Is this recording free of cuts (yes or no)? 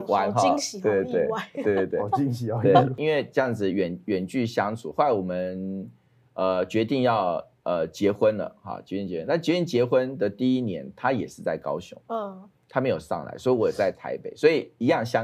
yes